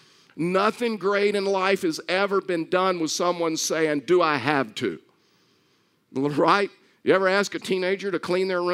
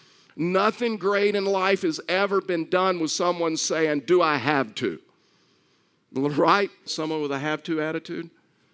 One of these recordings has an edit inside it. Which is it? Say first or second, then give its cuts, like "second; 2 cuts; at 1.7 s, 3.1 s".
second; 1 cut; at 6.9 s